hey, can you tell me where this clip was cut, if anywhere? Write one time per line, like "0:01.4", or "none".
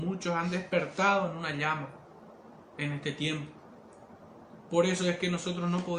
none